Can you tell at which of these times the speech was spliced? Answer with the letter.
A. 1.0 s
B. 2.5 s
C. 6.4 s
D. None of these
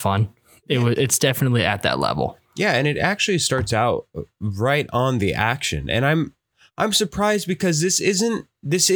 A